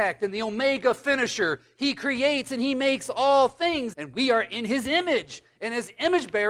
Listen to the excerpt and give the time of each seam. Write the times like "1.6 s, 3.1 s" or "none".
3.9 s